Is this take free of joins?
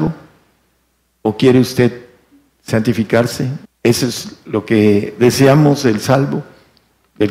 no; 1 cut; at 3.7 s

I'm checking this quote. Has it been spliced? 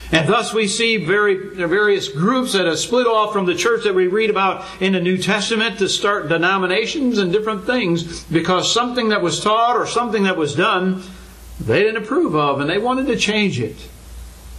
no; 0 cuts

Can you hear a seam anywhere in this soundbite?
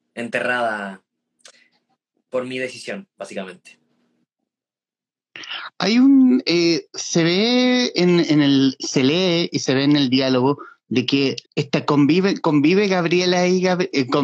yes; 1 cut; at 11.5 s

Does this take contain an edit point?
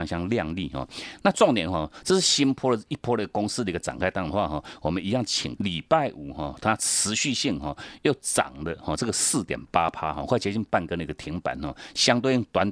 yes; 3 cuts; at 1.2 s, 5.6 s, 6.6 s

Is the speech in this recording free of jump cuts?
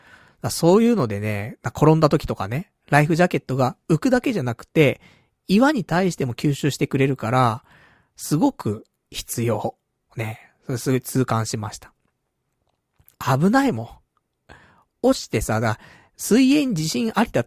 no; 1 cut; at 13.1 s

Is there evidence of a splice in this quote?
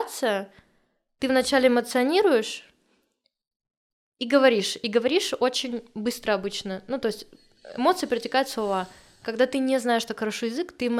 no; 0 cuts

